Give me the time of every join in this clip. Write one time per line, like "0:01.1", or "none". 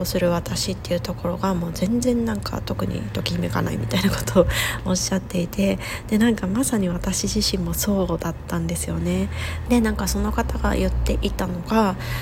0:09.7